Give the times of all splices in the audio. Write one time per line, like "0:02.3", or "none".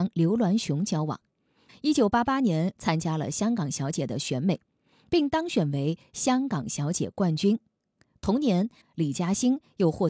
0:01.7
0:02.8
0:08.8